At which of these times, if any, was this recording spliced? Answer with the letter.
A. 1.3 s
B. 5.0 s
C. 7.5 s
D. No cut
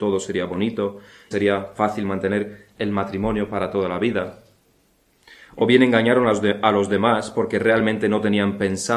A